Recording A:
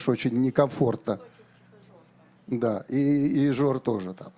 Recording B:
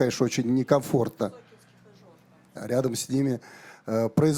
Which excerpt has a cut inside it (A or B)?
B